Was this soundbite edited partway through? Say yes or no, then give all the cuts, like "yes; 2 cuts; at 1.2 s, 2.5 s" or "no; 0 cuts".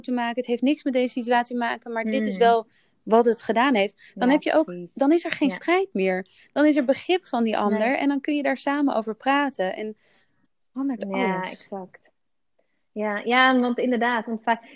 no; 0 cuts